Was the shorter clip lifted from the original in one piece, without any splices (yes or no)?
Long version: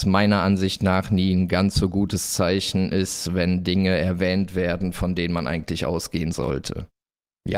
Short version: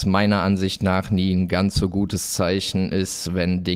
yes